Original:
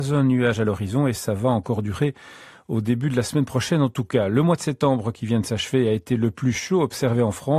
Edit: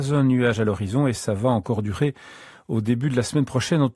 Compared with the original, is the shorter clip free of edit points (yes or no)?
yes